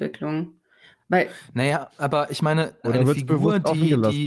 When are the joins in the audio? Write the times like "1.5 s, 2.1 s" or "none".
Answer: 2.8 s